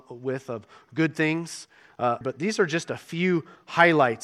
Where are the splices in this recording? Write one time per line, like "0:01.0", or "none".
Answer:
0:02.2